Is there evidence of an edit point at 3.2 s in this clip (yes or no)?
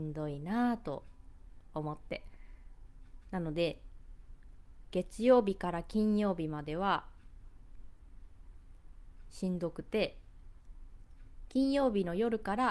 yes